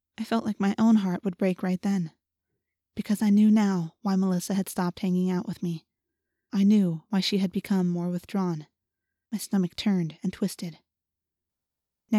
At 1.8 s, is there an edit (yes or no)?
no